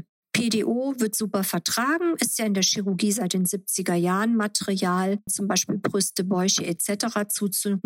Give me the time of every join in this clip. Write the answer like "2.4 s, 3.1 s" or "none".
5.3 s